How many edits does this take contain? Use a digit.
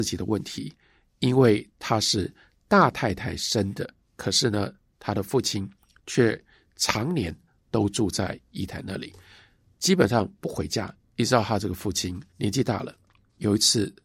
3